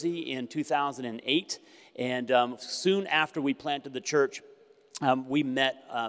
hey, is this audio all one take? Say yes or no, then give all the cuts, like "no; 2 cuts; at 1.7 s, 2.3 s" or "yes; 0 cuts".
yes; 0 cuts